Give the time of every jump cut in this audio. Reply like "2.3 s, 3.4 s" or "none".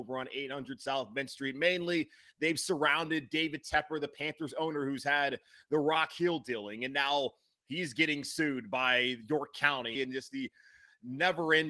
10.0 s